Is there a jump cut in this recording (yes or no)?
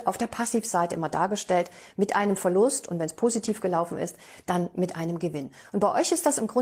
no